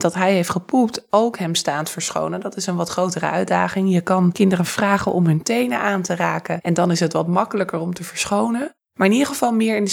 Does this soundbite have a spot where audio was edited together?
no; 0 cuts

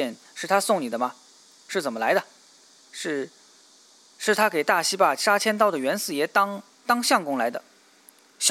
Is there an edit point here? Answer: no; 0 cuts

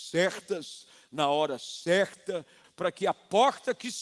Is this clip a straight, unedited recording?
no; 1 cut; at 2.6 s

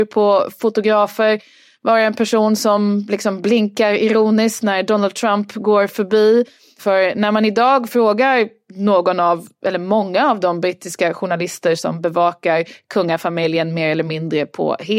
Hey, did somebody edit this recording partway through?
yes; 1 cut; at 6.8 s

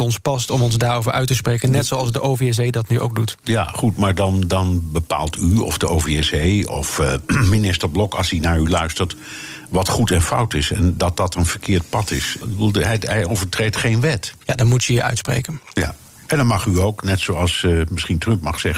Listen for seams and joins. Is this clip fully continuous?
no; 2 cuts; at 12.4 s, 14.4 s

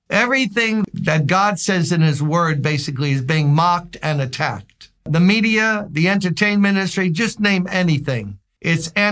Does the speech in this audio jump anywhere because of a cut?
yes; 1 cut; at 5.0 s

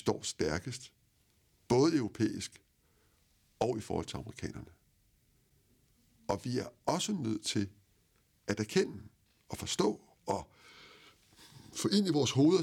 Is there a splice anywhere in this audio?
no; 0 cuts

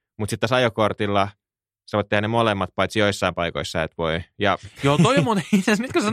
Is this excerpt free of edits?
yes; 0 cuts

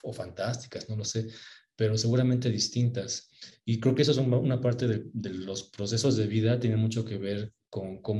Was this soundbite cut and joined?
no; 0 cuts

